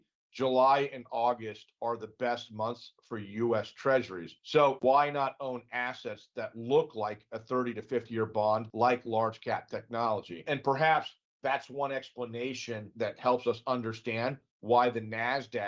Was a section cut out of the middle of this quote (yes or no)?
yes